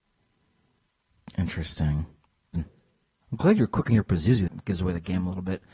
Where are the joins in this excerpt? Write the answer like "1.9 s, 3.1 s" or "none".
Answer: 2.5 s, 4.5 s

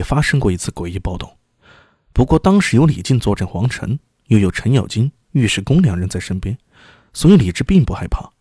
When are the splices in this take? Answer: none

